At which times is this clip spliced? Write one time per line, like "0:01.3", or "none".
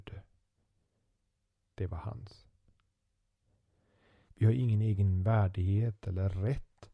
0:04.3